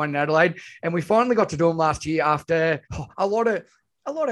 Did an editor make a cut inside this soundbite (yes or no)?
yes